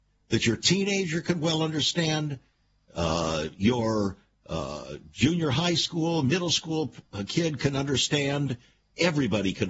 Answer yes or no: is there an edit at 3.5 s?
no